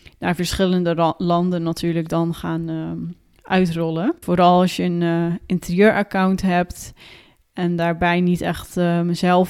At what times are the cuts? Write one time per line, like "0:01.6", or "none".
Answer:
0:04.2